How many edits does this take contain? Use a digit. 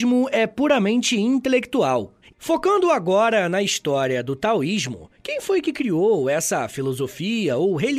1